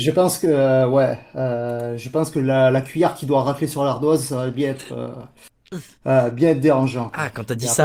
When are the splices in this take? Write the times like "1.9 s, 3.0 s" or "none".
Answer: none